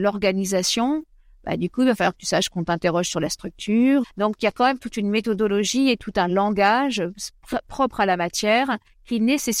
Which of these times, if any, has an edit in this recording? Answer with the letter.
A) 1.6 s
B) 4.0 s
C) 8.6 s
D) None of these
B